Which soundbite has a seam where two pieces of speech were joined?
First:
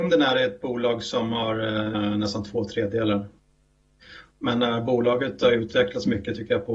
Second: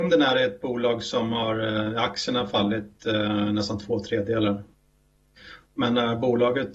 first; 1 cut; at 1.9 s

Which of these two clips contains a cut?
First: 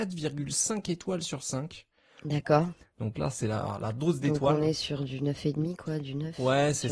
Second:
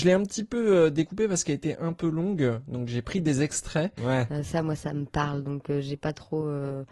second; 1 cut; at 4.0 s

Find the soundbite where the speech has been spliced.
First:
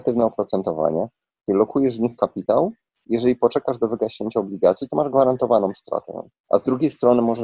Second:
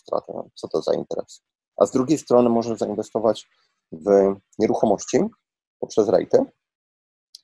first; 1 cut; at 6.3 s

